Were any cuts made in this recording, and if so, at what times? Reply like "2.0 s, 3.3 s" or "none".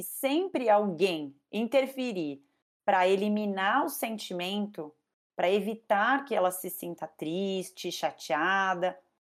none